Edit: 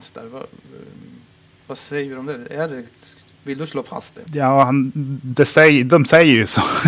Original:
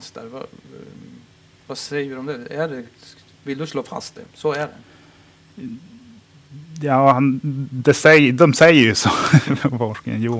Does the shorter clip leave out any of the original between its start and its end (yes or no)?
yes